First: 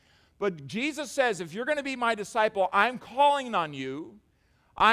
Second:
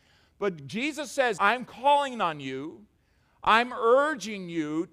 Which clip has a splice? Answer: second; 1 cut; at 1.4 s

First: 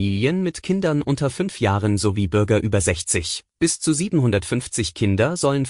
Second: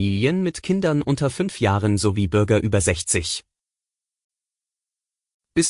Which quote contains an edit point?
first; 1 cut; at 3.5 s

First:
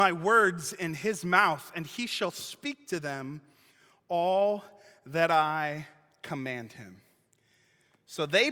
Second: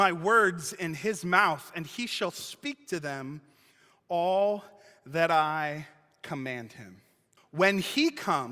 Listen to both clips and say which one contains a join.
second; 1 cut; at 7.4 s

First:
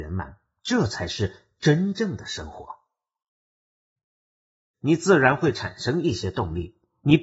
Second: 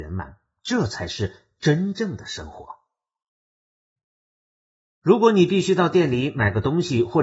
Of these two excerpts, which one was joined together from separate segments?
first; 1 cut; at 4.7 s

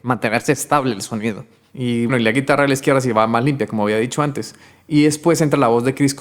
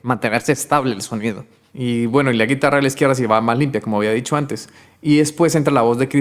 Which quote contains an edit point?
first; 1 cut; at 2.1 s

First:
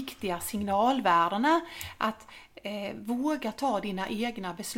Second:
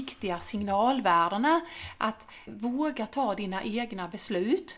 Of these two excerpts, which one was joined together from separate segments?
second; 1 cut; at 2.5 s

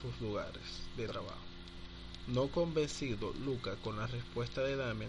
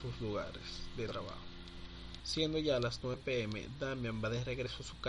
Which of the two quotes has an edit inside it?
second; 1 cut; at 2.2 s

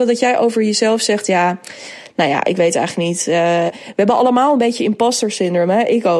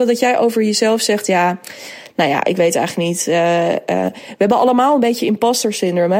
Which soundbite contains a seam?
first; 1 cut; at 3.7 s

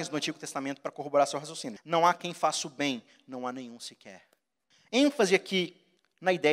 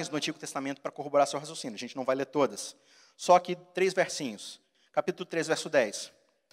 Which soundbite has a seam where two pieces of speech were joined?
first; 1 cut; at 1.8 s

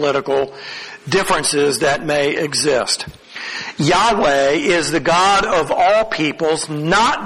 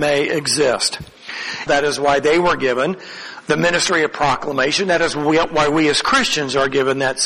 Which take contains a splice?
second; 1 cut; at 1.7 s

